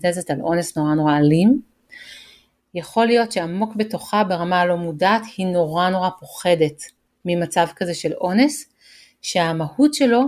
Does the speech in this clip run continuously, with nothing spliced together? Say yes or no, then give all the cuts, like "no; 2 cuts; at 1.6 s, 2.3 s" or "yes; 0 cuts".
yes; 0 cuts